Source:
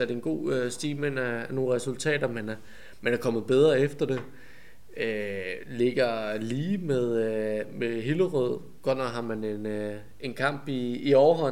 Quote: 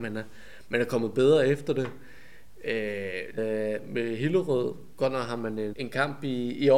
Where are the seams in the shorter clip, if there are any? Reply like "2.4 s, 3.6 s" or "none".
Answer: 3.4 s, 5.7 s

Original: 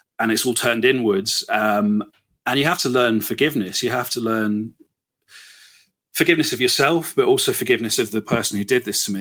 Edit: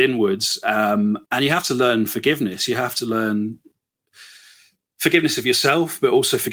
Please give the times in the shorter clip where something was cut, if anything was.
1.3 s

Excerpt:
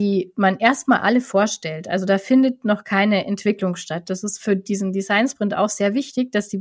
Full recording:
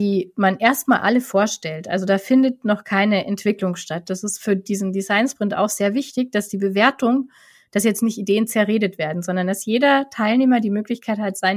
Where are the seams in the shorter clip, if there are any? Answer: none

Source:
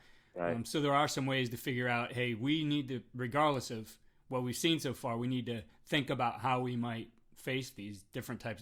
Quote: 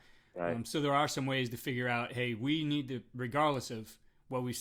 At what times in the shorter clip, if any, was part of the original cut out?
none

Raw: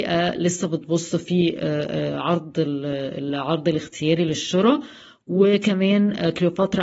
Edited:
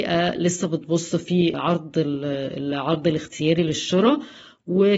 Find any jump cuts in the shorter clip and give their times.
1.5 s

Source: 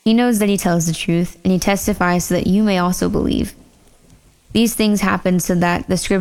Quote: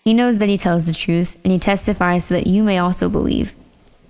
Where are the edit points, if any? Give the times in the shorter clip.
none

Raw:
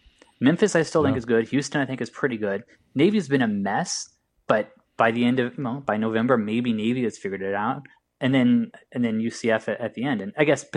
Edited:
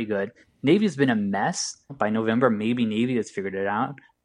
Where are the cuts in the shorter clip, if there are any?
1.9 s

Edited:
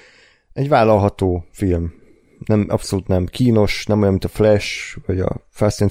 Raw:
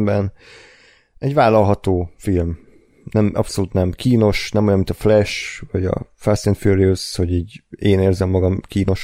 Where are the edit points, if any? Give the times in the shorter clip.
none

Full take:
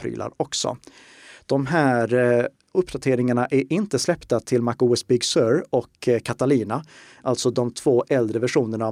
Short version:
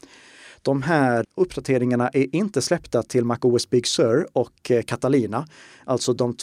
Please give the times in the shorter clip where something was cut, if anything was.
1.2 s

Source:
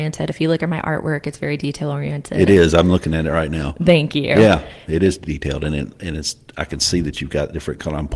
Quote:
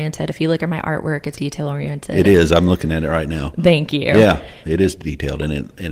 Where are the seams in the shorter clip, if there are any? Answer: 1.4 s

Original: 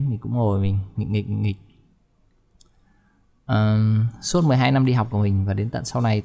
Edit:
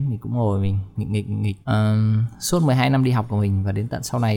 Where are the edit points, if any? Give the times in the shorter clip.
1.6 s

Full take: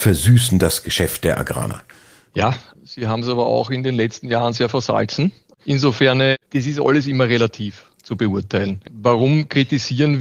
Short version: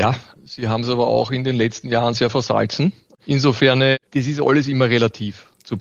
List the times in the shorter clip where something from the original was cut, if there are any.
none

